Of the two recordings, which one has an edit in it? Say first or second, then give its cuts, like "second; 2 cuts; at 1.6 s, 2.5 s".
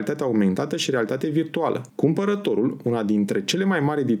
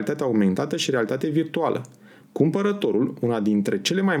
first; 1 cut; at 1.9 s